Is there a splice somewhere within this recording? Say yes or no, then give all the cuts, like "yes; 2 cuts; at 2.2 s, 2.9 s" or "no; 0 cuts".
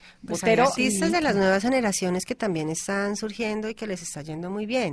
no; 0 cuts